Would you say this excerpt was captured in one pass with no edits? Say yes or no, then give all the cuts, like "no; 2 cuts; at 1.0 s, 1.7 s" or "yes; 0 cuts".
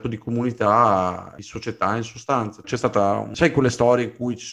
no; 1 cut; at 2.6 s